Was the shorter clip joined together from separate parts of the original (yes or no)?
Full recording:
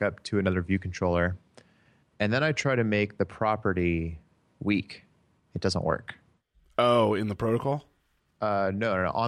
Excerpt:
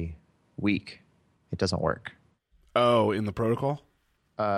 no